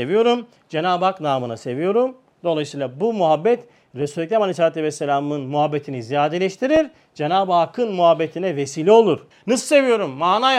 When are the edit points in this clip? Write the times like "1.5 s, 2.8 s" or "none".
9.3 s